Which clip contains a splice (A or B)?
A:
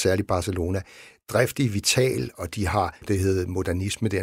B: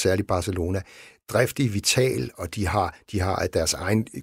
A